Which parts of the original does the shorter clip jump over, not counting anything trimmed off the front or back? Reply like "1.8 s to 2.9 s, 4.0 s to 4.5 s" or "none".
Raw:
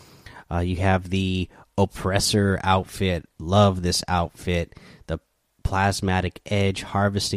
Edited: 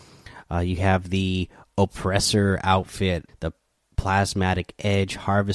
3.3 s to 5.0 s